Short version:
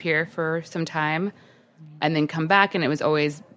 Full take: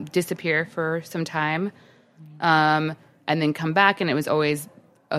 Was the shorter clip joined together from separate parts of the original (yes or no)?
yes